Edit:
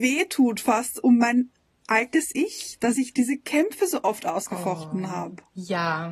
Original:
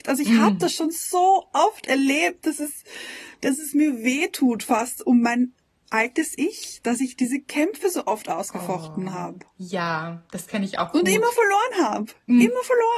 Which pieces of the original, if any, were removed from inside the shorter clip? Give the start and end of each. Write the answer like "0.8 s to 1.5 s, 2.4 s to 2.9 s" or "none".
none